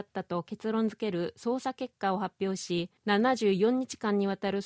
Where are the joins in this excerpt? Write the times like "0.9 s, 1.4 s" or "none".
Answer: 3.0 s

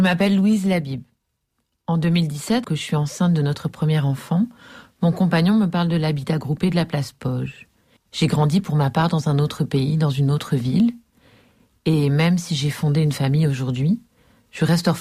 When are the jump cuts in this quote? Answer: 2.6 s, 8.0 s

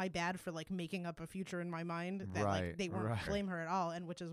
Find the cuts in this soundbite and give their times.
3.3 s

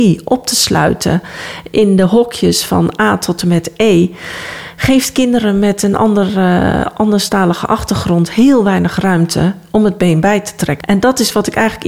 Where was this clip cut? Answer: 10.8 s

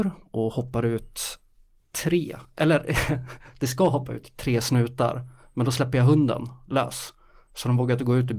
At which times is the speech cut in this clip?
none

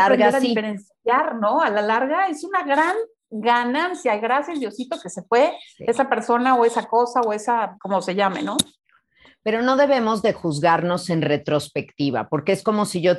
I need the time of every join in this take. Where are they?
7.8 s

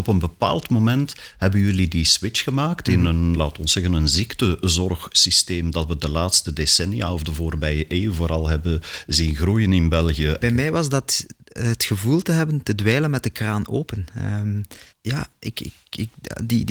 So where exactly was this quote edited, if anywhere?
3.3 s, 10.4 s, 14.9 s

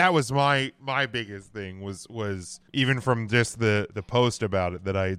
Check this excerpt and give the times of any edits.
2.7 s, 3.9 s

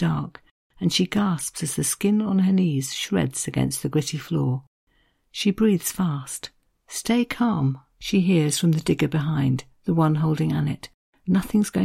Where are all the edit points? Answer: 5.2 s

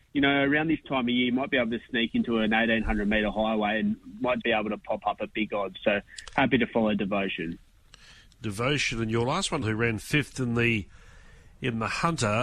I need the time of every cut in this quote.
4.4 s, 9.6 s

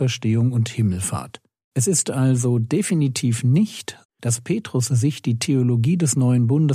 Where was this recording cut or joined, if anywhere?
1.6 s, 4.0 s

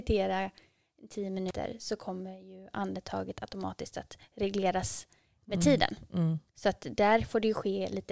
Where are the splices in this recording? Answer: 6.5 s

